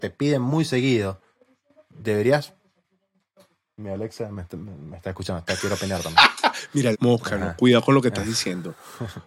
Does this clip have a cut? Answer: yes; 1 cut; at 6.9 s

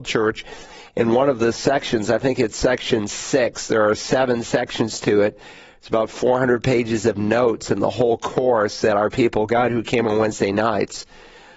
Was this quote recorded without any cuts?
yes; 0 cuts

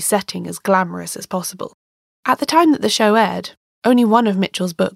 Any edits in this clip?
yes; 1 cut; at 2.2 s

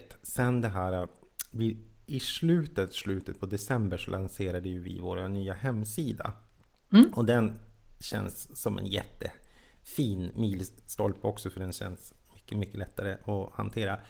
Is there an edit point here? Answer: no; 0 cuts

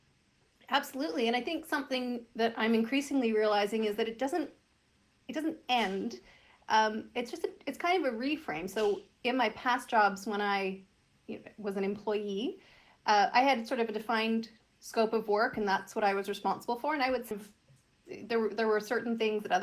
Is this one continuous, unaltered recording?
yes; 0 cuts

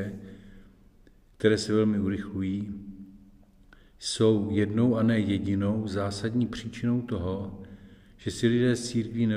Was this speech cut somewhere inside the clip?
no; 0 cuts

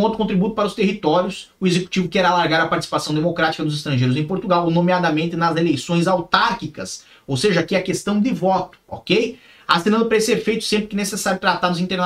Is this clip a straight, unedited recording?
yes; 0 cuts

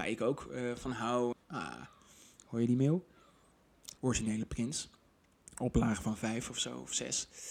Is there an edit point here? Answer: yes; 2 cuts; at 1.3 s, 4.0 s

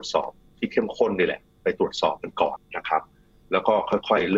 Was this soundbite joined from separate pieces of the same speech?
yes; 1 cut; at 2.6 s

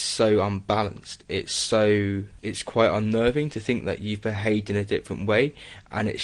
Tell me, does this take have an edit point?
no; 0 cuts

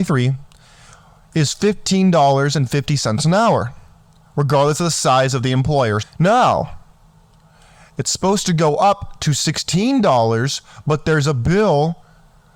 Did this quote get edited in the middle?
yes; 1 cut; at 6.0 s

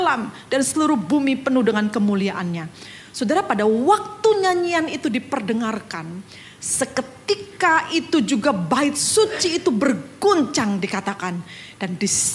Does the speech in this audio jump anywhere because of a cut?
no; 0 cuts

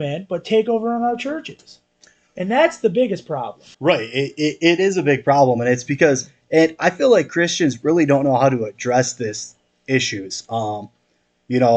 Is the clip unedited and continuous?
no; 1 cut; at 3.7 s

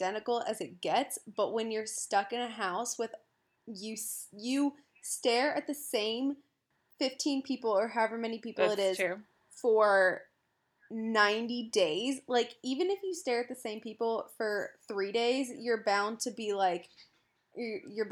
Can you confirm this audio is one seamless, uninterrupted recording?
yes; 0 cuts

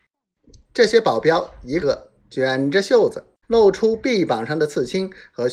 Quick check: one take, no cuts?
no; 2 cuts; at 1.8 s, 3.4 s

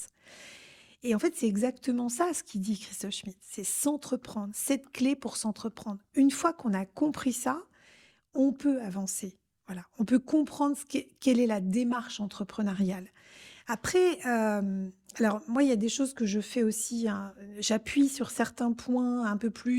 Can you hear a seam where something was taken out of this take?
no; 0 cuts

